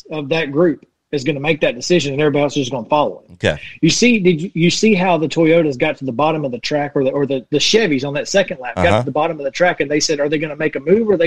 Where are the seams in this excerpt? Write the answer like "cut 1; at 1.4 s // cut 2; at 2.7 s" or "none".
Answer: none